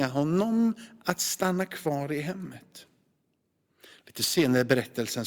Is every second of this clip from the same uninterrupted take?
yes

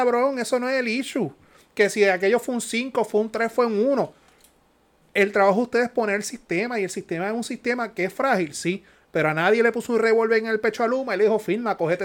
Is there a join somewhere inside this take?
no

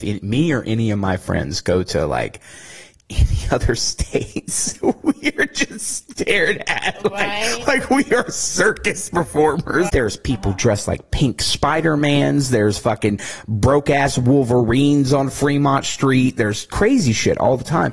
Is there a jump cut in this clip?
yes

